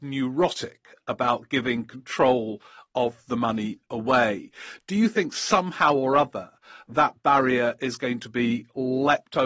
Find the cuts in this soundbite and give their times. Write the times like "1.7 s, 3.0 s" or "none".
none